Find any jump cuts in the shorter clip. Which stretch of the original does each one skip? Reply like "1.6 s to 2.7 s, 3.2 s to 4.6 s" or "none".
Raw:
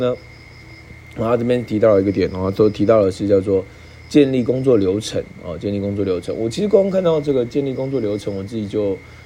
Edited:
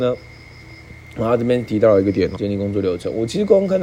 2.4 s to 5.6 s